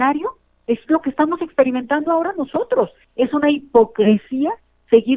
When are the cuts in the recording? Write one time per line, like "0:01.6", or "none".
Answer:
0:03.0